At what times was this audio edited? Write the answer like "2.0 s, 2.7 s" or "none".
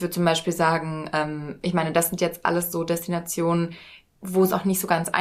none